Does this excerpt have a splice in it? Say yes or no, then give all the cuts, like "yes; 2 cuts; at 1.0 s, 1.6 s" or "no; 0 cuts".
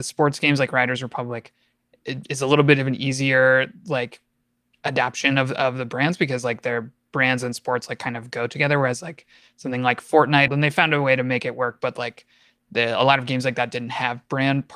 yes; 1 cut; at 10.5 s